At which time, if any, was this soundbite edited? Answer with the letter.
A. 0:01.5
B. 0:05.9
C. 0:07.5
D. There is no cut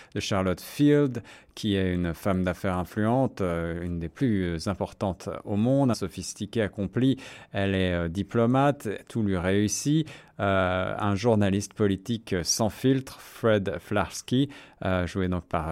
B